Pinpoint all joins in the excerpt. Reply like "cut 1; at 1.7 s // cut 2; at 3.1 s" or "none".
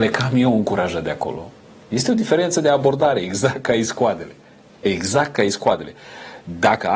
none